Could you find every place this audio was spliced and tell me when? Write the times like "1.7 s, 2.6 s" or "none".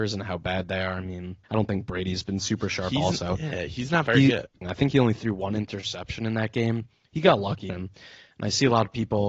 1.4 s, 4.6 s, 7.7 s